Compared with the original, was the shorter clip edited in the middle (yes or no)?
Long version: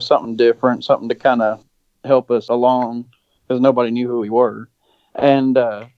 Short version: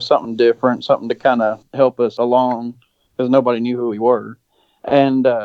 yes